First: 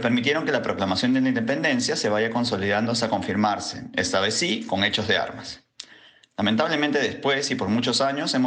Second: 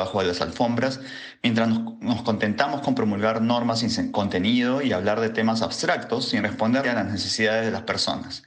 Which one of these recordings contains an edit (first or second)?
second